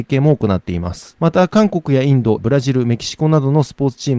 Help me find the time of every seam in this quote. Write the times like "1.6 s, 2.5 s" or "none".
2.4 s